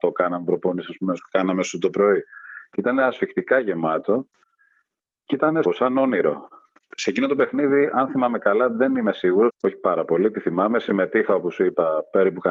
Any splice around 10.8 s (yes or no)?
no